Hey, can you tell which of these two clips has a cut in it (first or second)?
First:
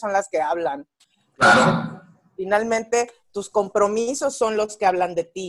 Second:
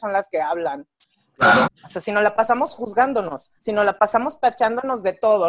second